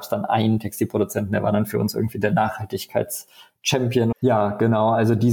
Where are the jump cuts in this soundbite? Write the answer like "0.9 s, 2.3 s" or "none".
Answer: 4.1 s